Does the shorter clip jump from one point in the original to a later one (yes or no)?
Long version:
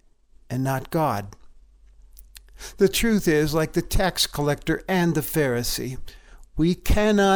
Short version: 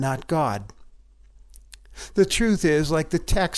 no